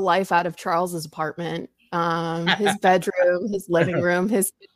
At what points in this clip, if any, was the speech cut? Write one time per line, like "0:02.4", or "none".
none